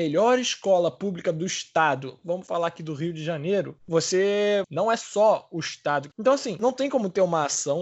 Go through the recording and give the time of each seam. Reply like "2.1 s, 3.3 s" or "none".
4.6 s, 6.1 s